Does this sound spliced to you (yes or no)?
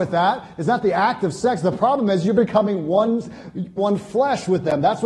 yes